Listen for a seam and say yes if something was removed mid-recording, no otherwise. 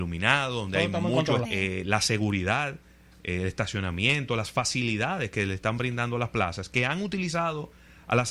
yes